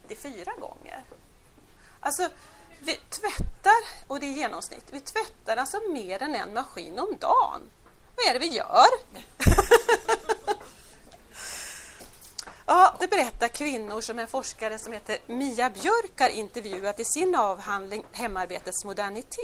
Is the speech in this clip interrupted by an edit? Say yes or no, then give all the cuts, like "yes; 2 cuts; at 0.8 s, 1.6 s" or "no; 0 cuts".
yes; 1 cut; at 13.0 s